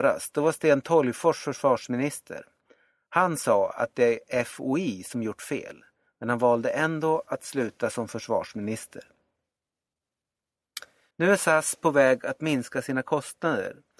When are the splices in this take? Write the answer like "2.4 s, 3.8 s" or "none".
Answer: 11.1 s